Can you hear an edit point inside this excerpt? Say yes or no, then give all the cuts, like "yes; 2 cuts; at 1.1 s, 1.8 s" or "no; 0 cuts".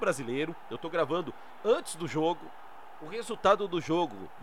no; 0 cuts